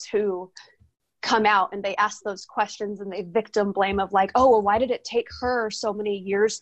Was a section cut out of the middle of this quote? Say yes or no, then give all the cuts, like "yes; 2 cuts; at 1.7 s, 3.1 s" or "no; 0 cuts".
no; 0 cuts